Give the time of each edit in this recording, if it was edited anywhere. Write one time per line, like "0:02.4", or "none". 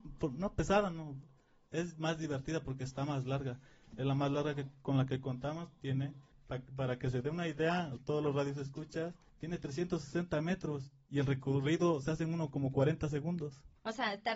none